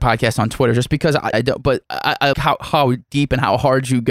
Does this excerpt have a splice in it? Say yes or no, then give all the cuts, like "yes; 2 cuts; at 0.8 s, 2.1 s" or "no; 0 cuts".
yes; 2 cuts; at 1.3 s, 2.3 s